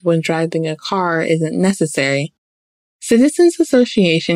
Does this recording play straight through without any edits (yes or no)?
no